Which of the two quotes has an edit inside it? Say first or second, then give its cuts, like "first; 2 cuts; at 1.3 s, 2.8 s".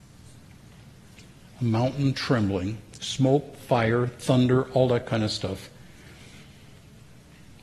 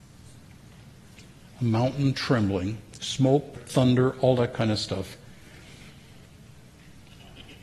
second; 1 cut; at 3.6 s